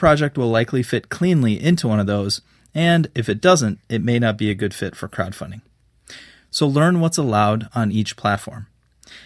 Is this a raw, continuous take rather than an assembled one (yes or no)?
no